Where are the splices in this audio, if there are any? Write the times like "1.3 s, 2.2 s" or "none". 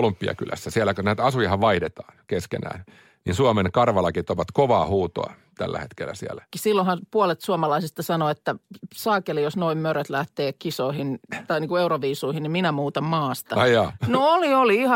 6.5 s